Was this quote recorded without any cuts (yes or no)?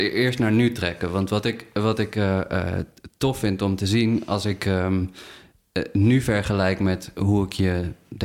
yes